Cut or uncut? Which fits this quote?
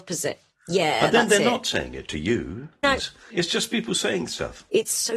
cut